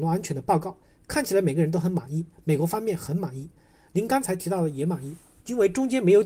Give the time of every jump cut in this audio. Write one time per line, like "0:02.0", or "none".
none